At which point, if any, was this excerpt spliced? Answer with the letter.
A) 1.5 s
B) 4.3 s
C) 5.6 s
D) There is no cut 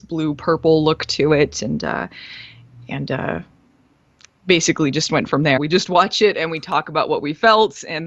C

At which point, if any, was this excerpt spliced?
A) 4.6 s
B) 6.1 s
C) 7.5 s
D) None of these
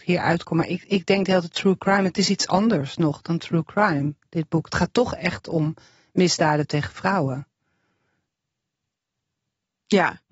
D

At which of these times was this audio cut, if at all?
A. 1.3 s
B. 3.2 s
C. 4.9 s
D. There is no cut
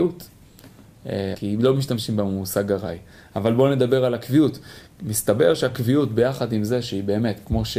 A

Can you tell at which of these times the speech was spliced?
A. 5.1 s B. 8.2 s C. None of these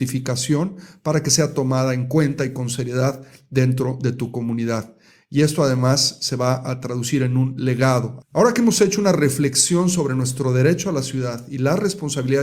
B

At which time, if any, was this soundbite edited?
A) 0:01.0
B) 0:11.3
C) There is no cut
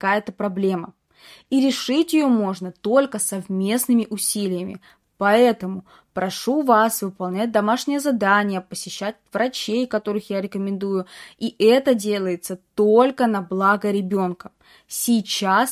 C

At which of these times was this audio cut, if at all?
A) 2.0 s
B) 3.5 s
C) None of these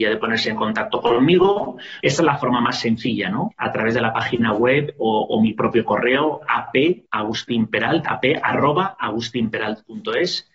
A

